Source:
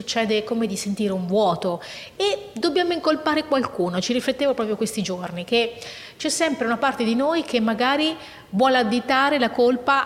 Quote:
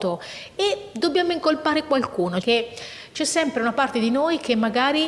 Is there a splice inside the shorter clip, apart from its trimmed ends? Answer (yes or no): yes